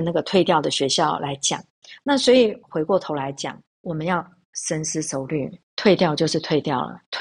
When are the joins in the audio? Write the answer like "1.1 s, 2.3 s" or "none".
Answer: 2.0 s